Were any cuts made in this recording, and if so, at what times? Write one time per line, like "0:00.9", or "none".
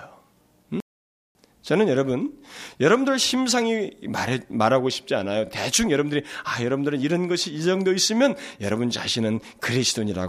none